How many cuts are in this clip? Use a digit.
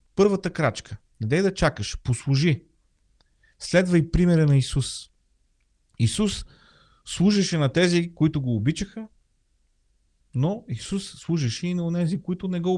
0